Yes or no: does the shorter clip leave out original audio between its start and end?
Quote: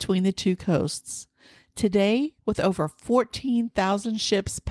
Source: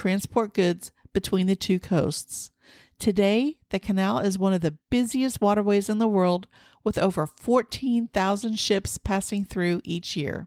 yes